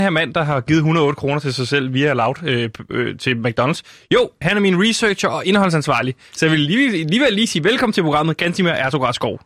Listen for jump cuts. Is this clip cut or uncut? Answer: uncut